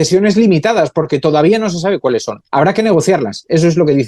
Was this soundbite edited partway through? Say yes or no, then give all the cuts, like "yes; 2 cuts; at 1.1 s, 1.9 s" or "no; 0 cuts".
no; 0 cuts